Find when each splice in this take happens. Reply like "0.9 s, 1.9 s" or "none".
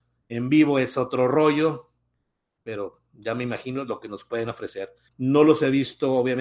5.1 s